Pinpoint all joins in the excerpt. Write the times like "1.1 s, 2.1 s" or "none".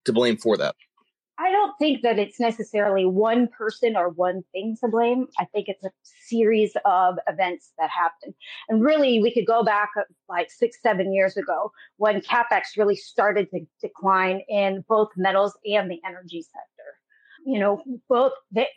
none